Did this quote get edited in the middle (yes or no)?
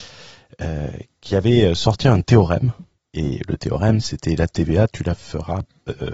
no